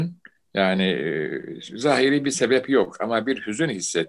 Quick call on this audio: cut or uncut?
uncut